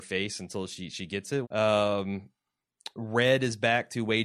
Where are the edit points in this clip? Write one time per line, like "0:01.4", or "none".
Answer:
0:01.4